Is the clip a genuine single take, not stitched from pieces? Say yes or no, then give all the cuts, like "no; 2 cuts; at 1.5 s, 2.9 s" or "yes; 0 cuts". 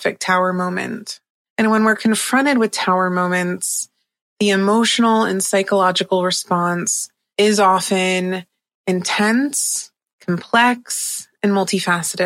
yes; 0 cuts